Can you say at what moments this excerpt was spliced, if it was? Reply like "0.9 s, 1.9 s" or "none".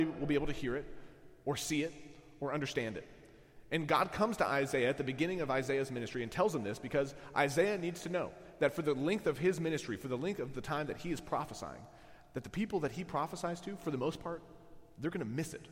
none